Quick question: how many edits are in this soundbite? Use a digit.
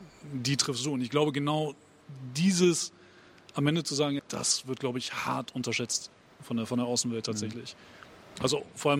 1